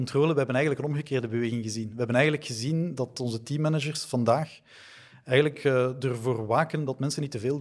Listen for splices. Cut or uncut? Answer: uncut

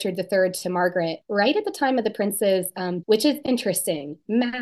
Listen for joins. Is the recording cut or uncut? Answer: cut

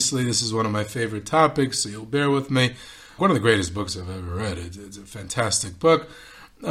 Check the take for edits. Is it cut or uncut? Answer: cut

